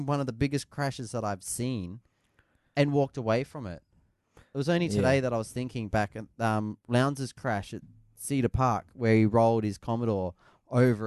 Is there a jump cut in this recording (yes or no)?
no